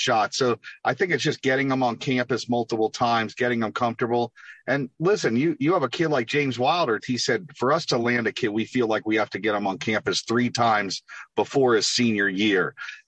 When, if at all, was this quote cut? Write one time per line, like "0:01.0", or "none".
0:07.0